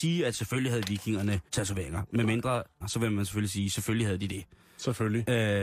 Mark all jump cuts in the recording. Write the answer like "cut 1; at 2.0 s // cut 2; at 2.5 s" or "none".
cut 1; at 1.5 s // cut 2; at 2.8 s